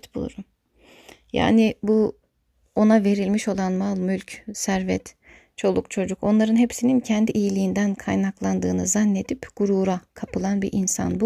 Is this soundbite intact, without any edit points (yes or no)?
yes